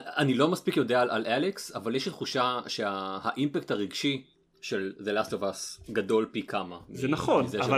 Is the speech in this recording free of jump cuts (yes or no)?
yes